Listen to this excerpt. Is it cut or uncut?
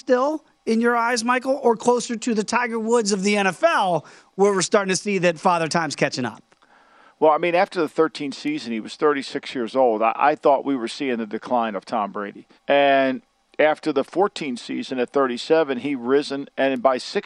cut